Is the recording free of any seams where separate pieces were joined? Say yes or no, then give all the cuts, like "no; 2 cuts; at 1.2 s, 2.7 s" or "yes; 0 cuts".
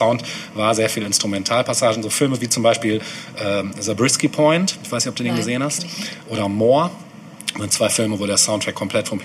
yes; 0 cuts